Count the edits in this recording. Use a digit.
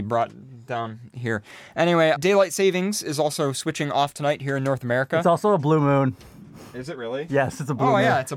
1